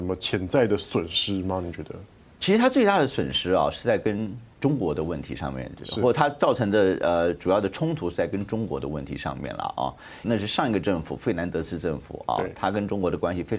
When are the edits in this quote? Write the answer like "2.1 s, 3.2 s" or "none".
10.2 s